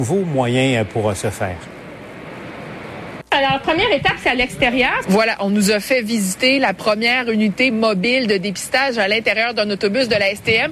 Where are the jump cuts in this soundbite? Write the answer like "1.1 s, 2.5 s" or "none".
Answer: 3.2 s, 5.0 s